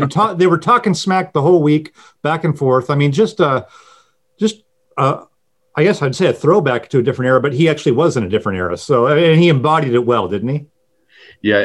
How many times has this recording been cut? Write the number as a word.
zero